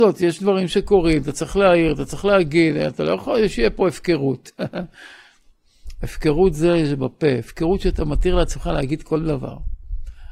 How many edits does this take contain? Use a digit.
0